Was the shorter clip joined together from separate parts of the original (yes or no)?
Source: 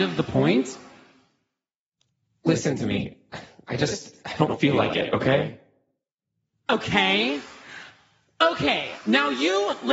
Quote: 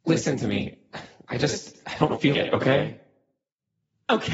yes